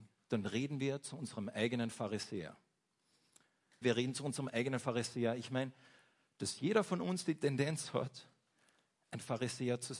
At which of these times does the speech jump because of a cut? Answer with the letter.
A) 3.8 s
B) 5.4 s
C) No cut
A